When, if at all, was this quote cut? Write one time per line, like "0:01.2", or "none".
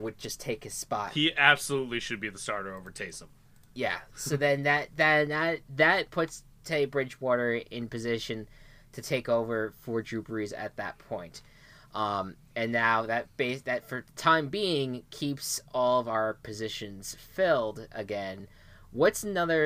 none